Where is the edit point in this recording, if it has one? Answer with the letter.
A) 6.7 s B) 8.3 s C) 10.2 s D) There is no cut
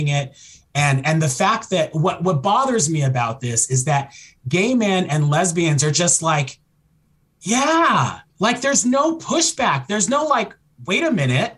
B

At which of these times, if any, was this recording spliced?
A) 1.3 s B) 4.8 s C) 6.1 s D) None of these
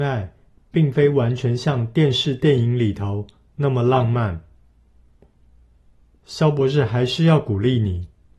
C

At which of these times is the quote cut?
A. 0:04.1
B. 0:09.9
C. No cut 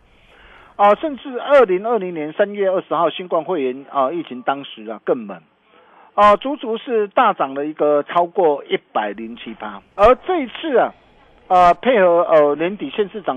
B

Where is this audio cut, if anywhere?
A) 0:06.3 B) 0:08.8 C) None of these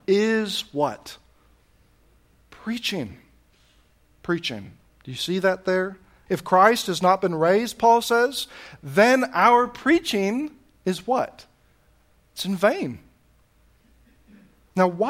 A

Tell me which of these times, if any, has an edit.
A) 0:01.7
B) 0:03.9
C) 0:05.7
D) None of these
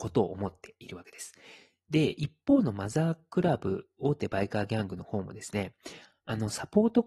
D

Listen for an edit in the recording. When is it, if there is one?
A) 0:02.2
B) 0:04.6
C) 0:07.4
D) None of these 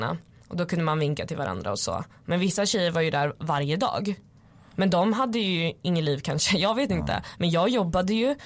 D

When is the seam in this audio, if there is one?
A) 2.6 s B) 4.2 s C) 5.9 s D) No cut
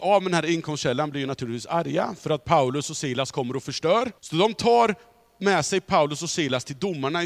B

